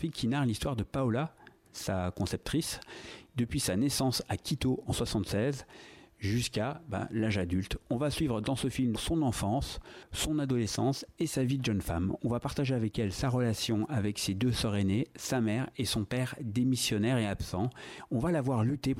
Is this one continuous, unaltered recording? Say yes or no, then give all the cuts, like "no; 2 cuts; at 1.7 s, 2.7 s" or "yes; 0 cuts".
no; 1 cut; at 8.9 s